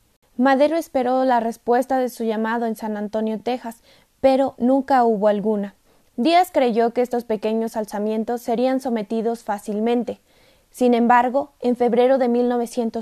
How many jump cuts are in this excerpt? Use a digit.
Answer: 0